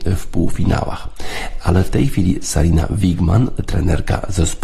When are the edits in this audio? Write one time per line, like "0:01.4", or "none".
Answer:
none